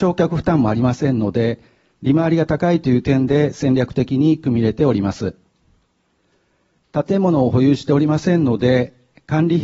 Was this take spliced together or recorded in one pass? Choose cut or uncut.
cut